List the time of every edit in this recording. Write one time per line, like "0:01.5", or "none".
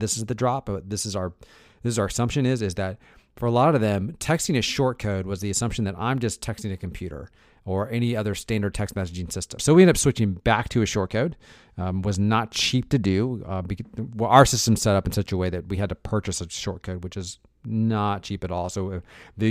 0:09.6